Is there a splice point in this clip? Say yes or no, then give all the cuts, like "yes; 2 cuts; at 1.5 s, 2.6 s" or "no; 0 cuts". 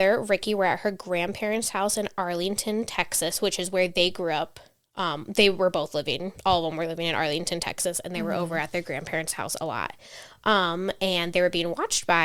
no; 0 cuts